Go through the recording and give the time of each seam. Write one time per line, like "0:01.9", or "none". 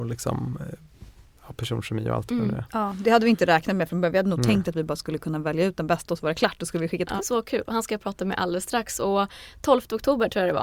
0:07.2